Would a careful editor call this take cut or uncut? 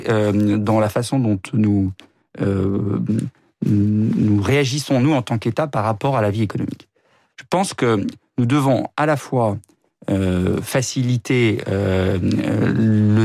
uncut